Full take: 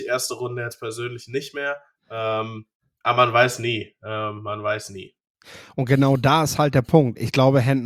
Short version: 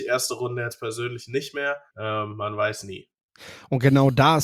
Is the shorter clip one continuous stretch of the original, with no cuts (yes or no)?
no